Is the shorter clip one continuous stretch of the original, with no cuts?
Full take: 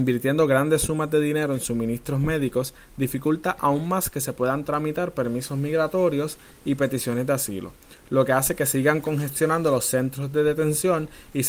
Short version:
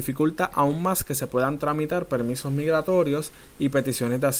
yes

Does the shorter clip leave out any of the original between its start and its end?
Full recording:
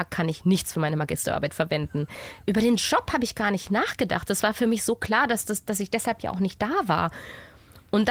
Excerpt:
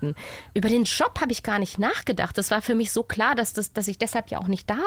no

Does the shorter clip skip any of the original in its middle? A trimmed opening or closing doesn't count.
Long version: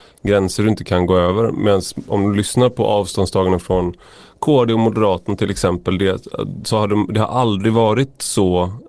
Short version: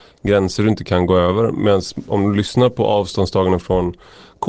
no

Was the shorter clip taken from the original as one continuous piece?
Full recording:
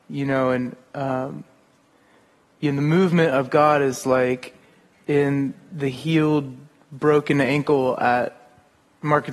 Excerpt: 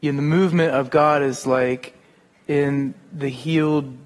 yes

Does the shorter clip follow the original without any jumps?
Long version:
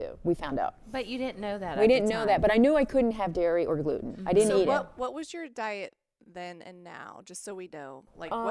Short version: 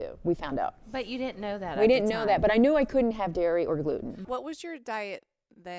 no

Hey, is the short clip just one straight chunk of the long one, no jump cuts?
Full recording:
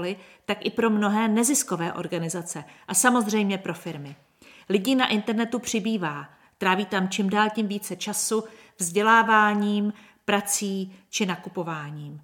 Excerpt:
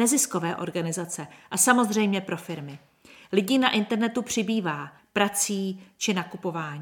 no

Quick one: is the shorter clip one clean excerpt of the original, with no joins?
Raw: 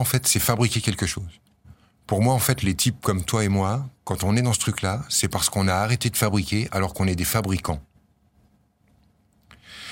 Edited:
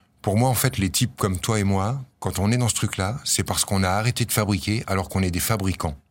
yes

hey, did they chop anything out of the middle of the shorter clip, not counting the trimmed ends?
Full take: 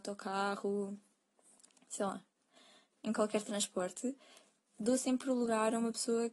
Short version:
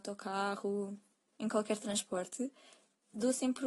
yes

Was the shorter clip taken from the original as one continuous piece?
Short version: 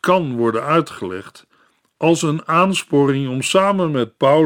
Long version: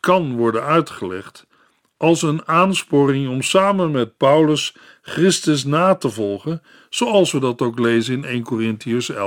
yes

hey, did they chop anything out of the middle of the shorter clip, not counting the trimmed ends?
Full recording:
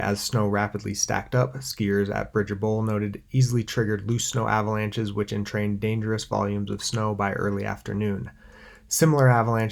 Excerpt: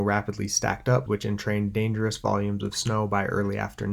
yes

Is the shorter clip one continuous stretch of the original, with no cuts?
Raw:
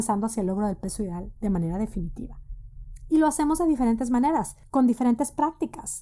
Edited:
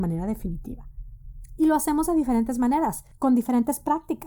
yes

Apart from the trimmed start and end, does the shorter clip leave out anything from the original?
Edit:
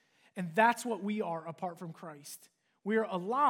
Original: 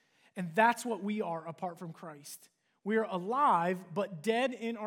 no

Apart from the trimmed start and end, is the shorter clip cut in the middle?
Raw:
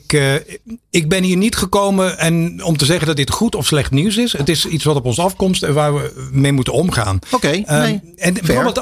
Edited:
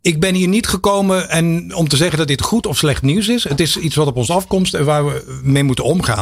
no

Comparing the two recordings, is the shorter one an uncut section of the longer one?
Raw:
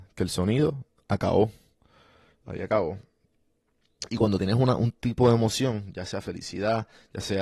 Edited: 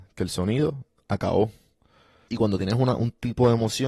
no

